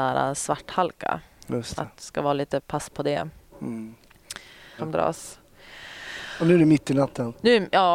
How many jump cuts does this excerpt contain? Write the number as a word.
two